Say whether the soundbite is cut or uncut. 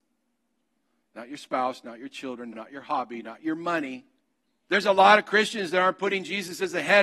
cut